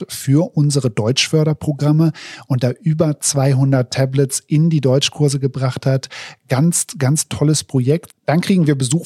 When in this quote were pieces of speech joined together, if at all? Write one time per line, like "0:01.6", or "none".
0:08.1